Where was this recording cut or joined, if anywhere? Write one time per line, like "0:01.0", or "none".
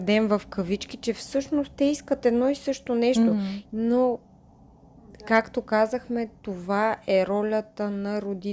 0:03.6